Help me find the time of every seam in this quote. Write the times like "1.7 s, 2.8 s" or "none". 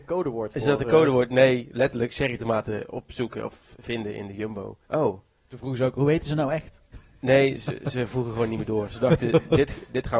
4.8 s